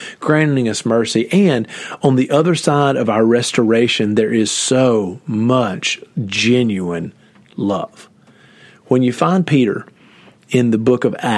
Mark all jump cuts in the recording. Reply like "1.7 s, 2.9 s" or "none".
none